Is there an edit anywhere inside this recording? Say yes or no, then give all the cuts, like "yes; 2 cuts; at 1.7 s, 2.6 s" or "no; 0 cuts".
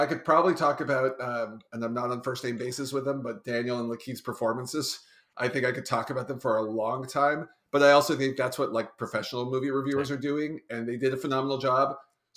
no; 0 cuts